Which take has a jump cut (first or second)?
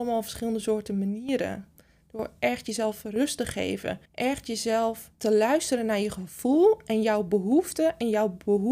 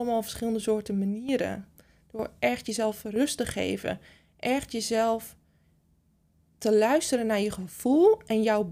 first